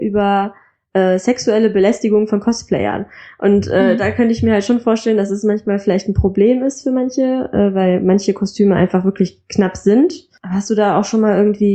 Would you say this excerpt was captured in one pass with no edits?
yes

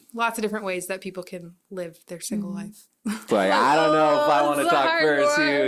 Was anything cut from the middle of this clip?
yes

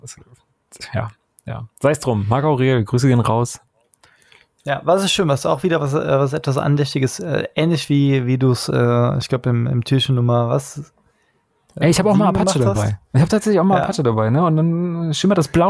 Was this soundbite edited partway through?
no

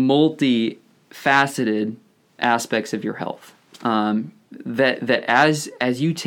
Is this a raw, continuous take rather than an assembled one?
yes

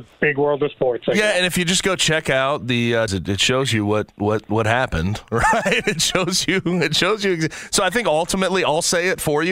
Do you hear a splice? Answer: yes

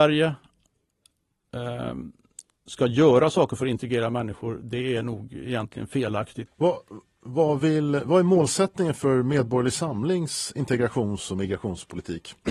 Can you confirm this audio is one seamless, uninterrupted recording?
no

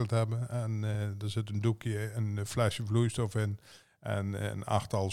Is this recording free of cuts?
yes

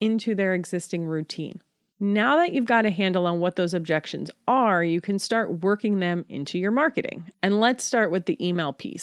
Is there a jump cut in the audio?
no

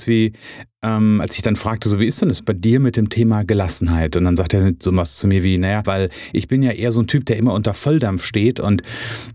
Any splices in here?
yes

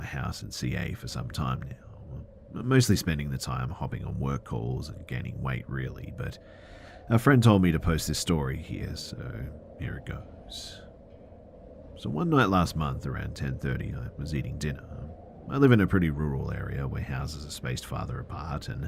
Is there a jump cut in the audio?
no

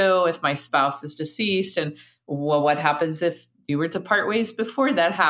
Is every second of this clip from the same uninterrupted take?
yes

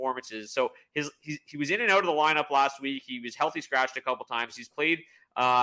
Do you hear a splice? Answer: no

